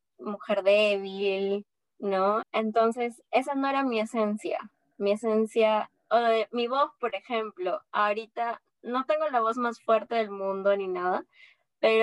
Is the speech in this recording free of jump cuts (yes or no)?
no